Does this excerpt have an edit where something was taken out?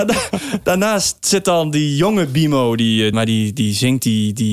yes; 1 cut; at 3.1 s

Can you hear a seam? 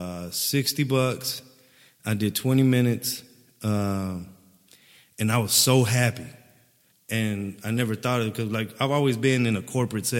yes; 1 cut; at 6.9 s

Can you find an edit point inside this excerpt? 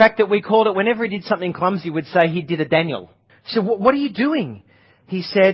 yes; 1 cut; at 3.3 s

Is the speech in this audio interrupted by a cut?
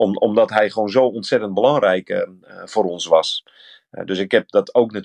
no; 0 cuts

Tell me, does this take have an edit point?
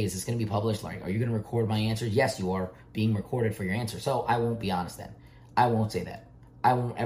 no; 0 cuts

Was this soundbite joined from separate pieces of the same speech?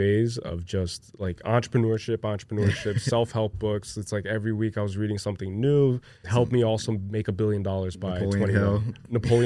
yes; 1 cut; at 6.2 s

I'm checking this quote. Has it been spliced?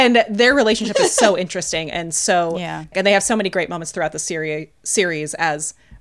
yes; 1 cut; at 2.9 s

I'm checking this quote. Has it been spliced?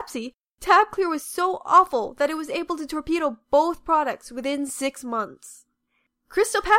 no; 0 cuts

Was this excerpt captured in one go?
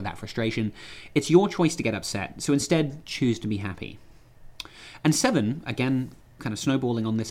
no; 1 cut; at 6.4 s

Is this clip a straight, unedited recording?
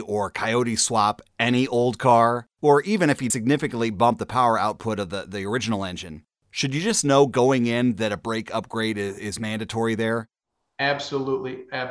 no; 1 cut; at 3.3 s

